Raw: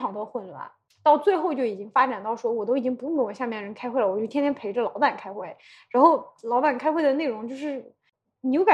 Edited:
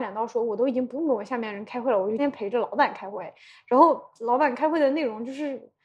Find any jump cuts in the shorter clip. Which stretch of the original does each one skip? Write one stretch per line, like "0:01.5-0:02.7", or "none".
0:04.3-0:04.4